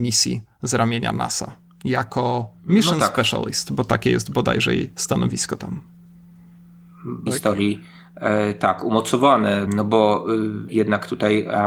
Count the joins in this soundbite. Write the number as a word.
three